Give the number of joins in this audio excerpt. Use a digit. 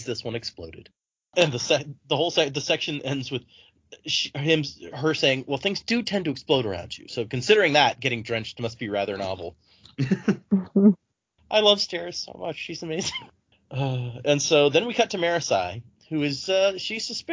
0